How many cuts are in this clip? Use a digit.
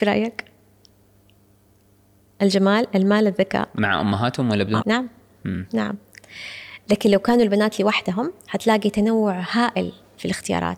2